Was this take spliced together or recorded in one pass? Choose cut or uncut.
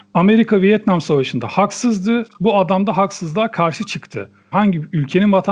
cut